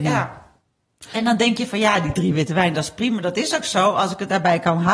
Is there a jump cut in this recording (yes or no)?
no